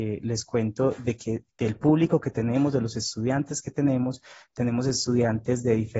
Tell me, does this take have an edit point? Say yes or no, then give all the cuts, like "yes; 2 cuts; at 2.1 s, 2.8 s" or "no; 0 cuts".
yes; 1 cut; at 1.5 s